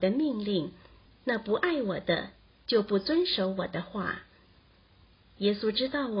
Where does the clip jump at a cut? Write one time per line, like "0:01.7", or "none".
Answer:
0:01.1